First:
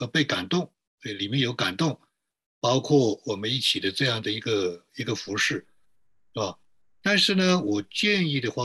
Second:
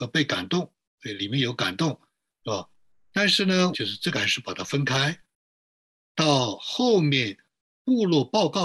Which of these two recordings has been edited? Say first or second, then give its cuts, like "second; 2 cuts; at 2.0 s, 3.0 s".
second; 2 cuts; at 2.4 s, 3.7 s